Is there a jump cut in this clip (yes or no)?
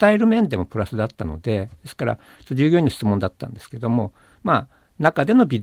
no